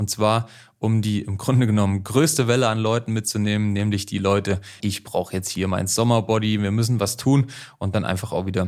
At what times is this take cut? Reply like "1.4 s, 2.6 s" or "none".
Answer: 4.8 s